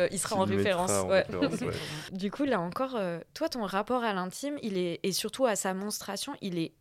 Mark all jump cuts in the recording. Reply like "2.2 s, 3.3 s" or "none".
2.1 s